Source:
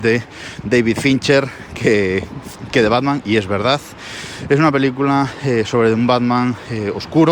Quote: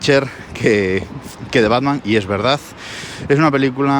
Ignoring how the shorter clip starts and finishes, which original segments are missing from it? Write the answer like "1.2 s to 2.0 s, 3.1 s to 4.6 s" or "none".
none